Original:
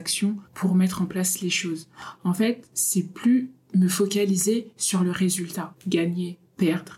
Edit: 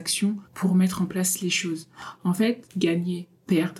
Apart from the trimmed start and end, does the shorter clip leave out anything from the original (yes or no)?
yes